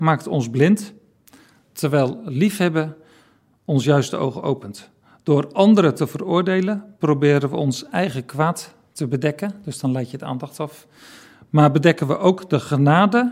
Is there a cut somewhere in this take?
no; 0 cuts

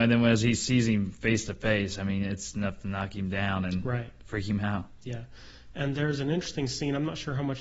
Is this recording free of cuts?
yes; 0 cuts

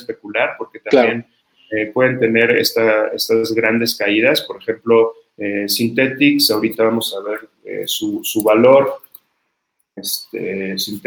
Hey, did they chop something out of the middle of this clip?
no; 0 cuts

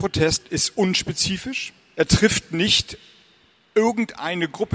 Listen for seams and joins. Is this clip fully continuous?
yes; 0 cuts

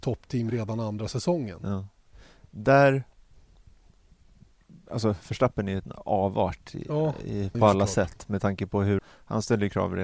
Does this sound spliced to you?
yes; 2 cuts; at 7.5 s, 9.0 s

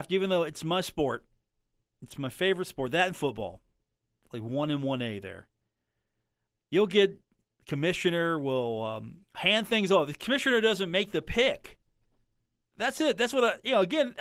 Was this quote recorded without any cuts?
no; 1 cut; at 12.6 s

